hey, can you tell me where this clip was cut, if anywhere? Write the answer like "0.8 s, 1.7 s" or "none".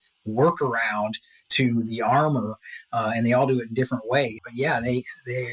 4.4 s